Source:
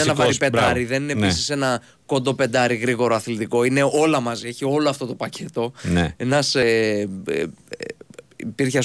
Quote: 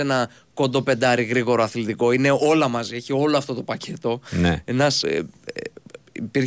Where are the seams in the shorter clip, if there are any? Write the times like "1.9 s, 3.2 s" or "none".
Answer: 5.0 s